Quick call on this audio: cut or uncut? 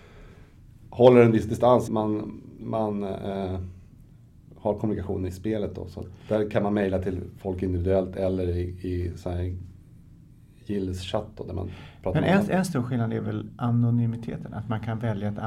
cut